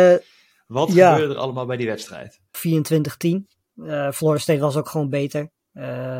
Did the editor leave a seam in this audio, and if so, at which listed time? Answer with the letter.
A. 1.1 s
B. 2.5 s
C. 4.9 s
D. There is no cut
B